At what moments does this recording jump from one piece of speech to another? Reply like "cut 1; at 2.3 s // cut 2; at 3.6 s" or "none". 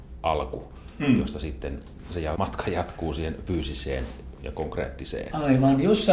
cut 1; at 2.4 s